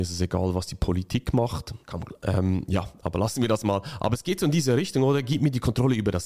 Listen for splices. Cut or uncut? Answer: cut